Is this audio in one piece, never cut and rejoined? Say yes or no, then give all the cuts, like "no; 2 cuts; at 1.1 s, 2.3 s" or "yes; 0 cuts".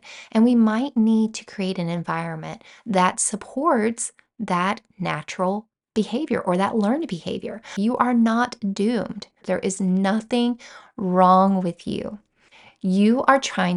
no; 1 cut; at 9.4 s